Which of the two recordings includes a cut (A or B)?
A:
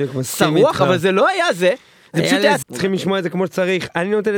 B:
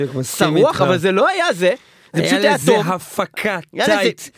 A